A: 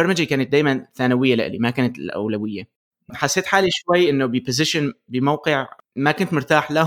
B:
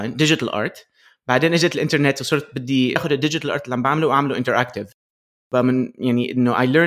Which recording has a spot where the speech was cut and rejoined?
A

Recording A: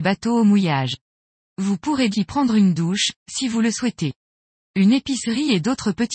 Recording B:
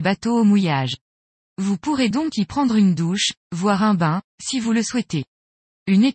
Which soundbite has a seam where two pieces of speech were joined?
A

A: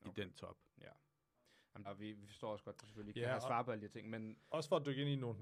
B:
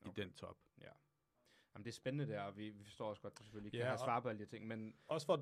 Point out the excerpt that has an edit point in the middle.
A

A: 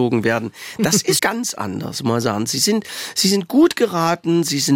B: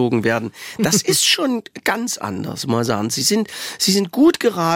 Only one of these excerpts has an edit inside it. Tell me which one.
A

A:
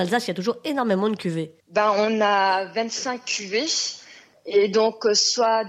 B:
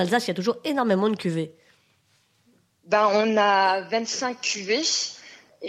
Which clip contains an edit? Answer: A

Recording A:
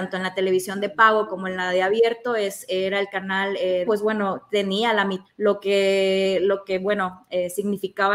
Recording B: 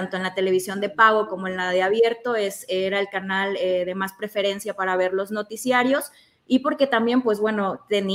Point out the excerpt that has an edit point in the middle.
A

